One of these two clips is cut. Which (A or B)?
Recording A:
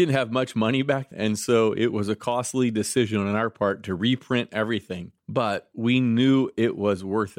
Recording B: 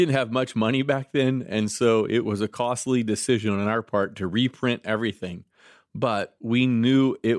A